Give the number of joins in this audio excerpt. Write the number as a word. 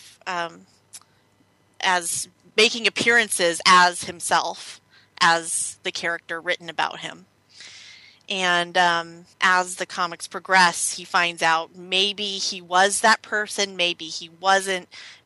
one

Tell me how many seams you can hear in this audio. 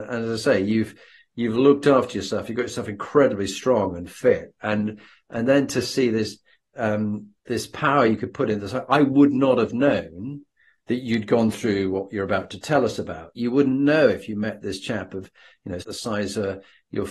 two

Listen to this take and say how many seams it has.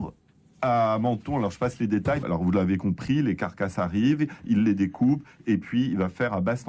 one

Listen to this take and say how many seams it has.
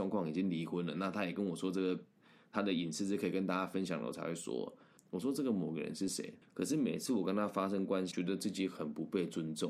three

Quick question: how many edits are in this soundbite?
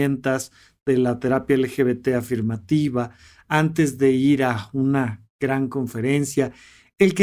zero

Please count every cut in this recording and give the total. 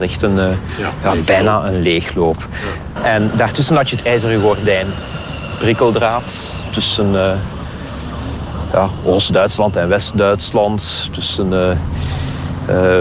one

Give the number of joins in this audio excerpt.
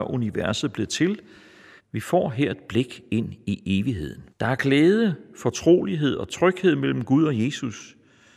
two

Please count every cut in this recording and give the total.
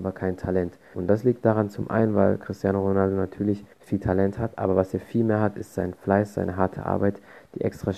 two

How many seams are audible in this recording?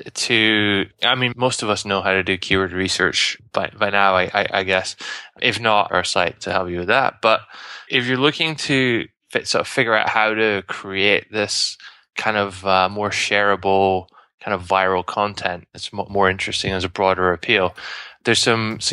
one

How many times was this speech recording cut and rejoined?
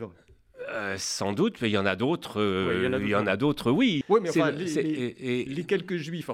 one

